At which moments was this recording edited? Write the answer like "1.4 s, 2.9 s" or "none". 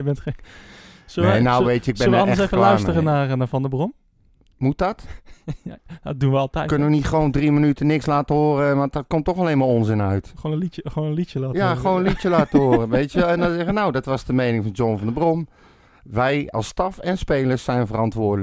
none